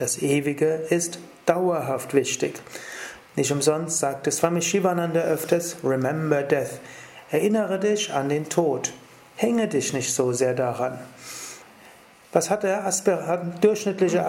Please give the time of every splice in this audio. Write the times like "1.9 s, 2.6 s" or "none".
3.3 s, 9.3 s